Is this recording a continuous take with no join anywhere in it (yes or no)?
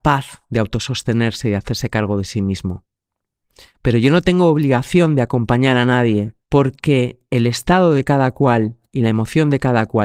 no